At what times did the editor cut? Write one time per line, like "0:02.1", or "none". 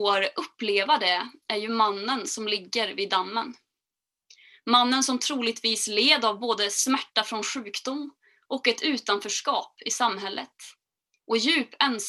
none